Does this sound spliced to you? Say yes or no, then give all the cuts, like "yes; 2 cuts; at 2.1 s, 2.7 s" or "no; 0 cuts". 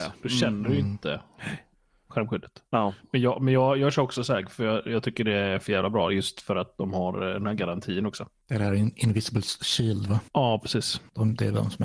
no; 0 cuts